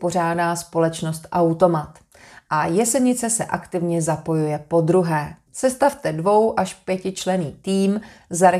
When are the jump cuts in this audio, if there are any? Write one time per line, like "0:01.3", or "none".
0:05.5